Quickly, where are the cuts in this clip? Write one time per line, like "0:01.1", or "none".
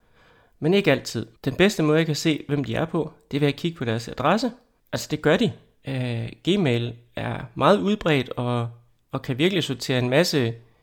0:01.4
0:04.8